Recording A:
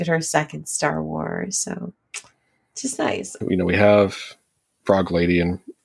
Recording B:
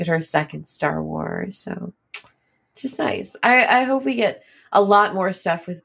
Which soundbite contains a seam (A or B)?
A